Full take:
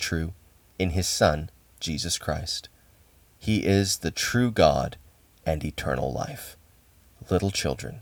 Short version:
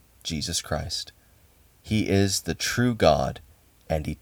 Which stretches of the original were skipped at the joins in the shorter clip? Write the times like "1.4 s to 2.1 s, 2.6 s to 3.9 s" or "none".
none